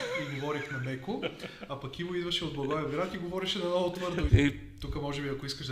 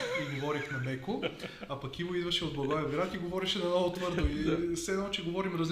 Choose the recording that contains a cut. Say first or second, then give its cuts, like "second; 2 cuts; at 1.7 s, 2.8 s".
first; 1 cut; at 4.3 s